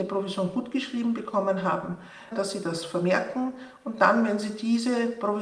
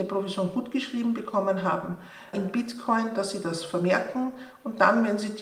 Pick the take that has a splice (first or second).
first